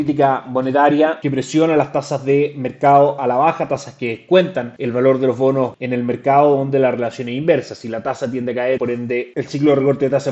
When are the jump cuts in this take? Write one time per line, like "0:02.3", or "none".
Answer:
0:08.8